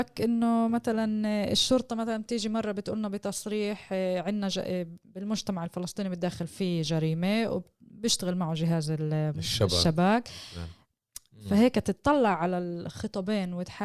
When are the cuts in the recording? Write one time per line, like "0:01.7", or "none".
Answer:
none